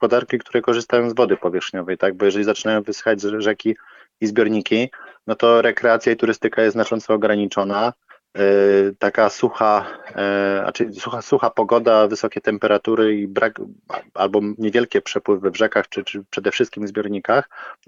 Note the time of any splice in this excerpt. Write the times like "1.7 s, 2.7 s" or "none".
none

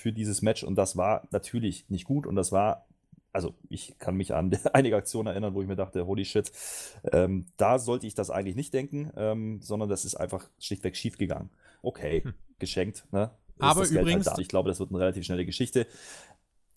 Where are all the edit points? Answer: 11.8 s, 14.4 s

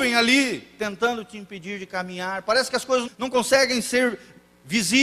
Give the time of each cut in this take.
3.1 s

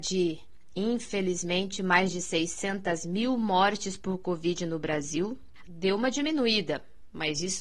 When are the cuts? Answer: 5.6 s

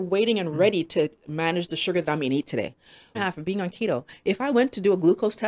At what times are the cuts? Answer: 3.1 s

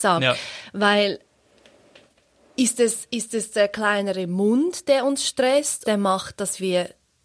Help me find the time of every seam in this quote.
5.8 s

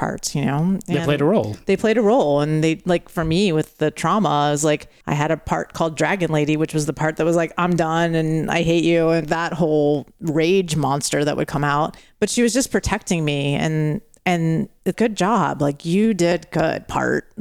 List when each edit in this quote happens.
9.2 s, 14.9 s

